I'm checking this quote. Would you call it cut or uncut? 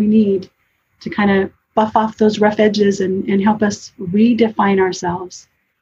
uncut